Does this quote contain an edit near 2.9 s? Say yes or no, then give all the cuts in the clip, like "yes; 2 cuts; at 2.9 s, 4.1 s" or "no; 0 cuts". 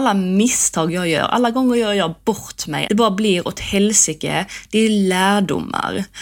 yes; 1 cut; at 2.9 s